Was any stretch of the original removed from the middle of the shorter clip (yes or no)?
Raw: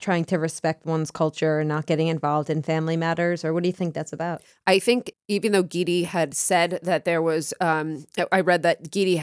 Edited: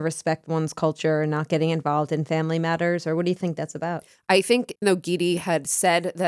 yes